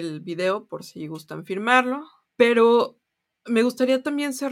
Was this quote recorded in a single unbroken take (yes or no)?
no